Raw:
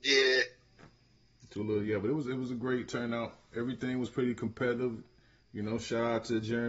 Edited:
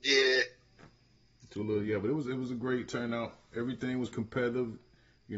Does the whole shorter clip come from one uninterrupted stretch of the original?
no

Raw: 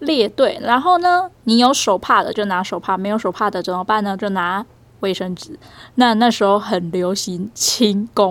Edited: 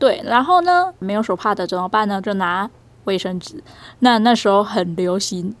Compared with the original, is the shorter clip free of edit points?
no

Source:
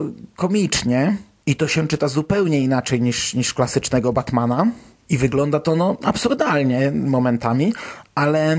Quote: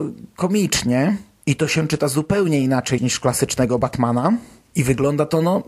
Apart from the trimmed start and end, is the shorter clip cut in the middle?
yes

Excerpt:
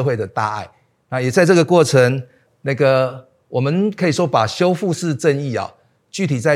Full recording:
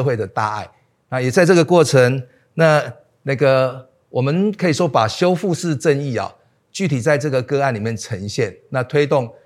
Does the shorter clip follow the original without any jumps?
no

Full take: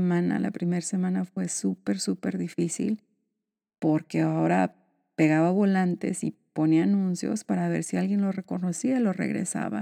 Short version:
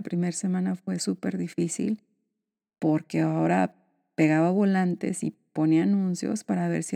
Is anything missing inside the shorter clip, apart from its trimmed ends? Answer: yes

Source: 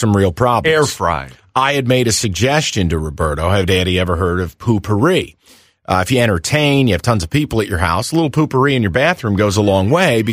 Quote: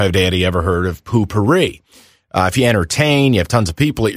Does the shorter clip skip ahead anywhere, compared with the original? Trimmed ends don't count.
no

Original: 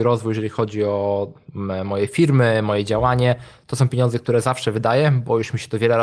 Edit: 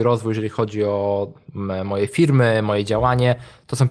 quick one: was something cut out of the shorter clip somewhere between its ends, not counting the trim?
no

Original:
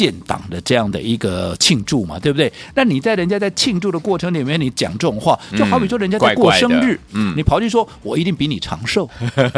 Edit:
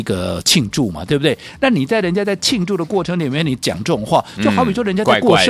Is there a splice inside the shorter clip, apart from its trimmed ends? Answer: no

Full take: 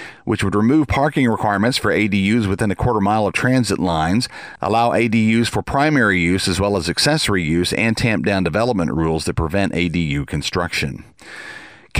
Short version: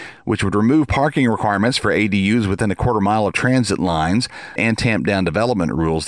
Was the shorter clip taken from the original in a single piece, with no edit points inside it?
no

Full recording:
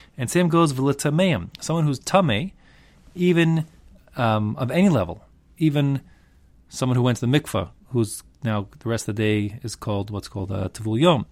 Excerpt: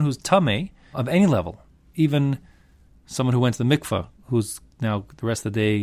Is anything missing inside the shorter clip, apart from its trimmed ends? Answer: yes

